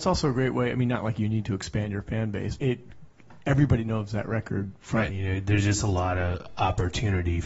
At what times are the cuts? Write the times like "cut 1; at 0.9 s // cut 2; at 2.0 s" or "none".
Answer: cut 1; at 2.6 s // cut 2; at 5.1 s